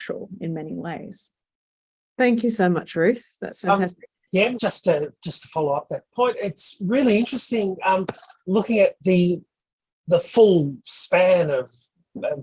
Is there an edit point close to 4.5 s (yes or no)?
yes